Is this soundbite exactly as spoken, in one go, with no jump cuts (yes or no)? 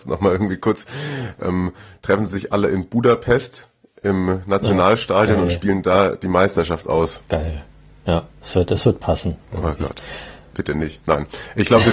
no